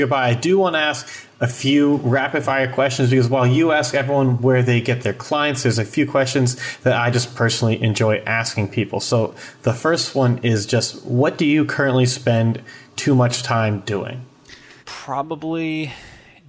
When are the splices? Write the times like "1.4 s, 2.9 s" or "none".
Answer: 14.8 s